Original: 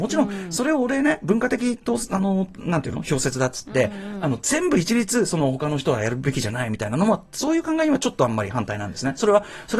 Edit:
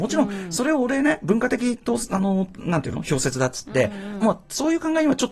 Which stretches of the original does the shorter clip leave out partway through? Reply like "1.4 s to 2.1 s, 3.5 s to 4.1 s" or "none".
4.2 s to 7.0 s